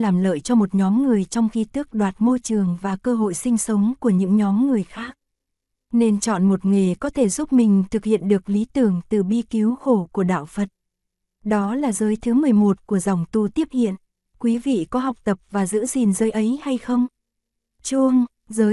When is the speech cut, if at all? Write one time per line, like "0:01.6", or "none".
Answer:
none

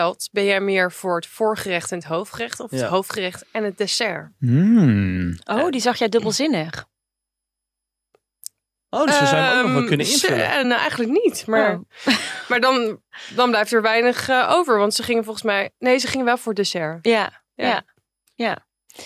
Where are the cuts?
none

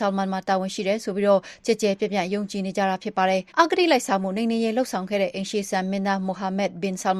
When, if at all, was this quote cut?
0:03.5

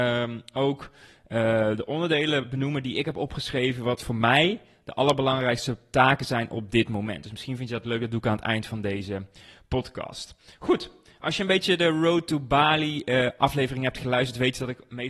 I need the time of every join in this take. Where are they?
none

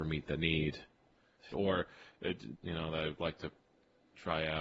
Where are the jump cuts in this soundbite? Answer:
0:01.5
0:02.5

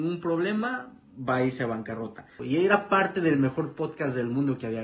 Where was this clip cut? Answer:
0:02.4

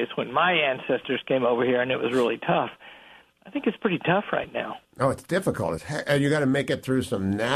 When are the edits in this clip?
none

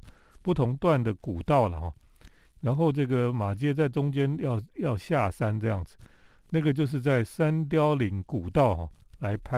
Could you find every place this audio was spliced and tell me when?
0:02.5

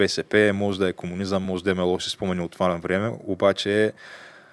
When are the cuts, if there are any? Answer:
none

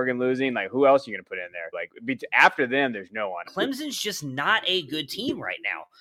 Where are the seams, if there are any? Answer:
0:01.7
0:03.4

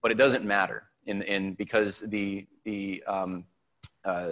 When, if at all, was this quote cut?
none

